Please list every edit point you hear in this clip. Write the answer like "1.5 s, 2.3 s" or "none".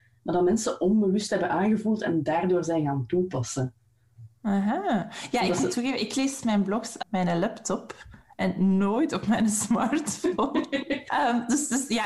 7.0 s, 11.1 s